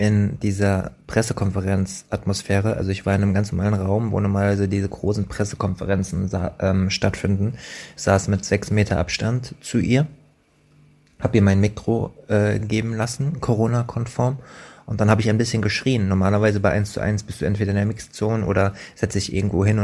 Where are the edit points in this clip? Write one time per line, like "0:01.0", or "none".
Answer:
none